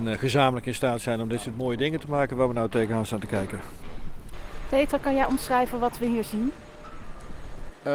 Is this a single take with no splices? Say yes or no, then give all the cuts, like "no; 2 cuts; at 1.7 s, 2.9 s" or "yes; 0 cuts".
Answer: yes; 0 cuts